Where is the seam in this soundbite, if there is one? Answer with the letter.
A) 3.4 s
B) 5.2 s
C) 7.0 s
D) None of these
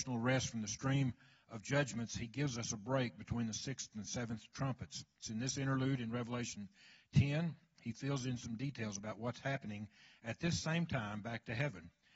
B